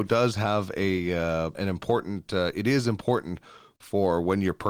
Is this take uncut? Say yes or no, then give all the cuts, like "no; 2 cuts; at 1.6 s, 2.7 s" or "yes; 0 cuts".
no; 1 cut; at 1.5 s